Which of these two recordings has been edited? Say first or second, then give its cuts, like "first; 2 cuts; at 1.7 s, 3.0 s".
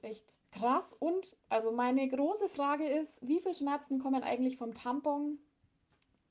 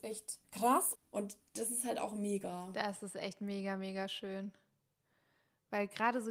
second; 1 cut; at 1.0 s